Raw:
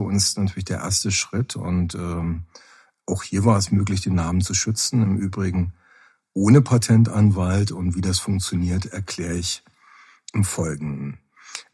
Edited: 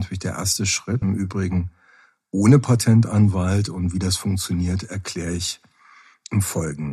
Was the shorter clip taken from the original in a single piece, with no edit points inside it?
no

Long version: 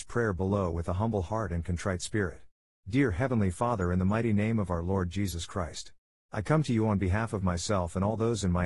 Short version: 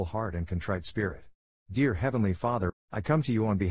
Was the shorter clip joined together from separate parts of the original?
yes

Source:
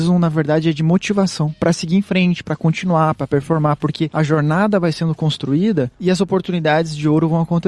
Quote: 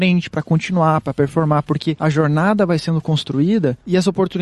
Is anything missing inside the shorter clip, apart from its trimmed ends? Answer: no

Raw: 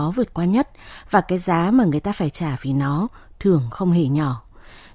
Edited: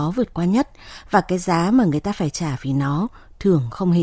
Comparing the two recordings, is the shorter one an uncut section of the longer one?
yes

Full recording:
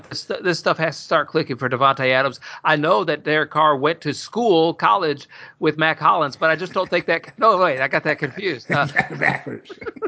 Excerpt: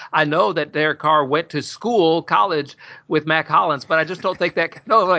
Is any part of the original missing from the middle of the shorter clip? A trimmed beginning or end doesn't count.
no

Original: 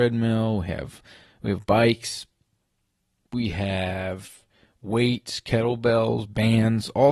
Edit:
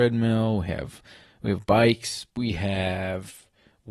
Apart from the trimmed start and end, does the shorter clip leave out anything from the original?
yes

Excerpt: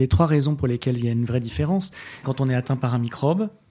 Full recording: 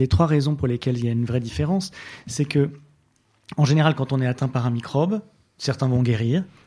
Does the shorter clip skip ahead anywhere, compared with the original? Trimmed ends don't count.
yes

